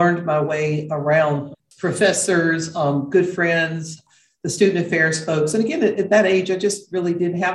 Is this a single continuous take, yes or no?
yes